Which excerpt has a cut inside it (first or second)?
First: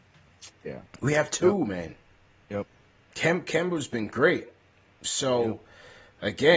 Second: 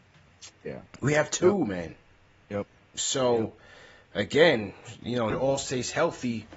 second